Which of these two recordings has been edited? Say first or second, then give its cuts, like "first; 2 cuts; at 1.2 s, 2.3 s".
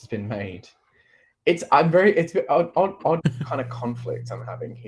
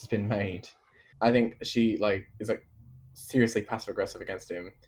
second; 2 cuts; at 1.1 s, 2.3 s